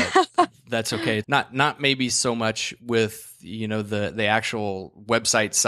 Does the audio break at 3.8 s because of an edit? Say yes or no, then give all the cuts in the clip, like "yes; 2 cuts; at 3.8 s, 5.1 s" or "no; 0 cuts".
no; 1 cut; at 1.2 s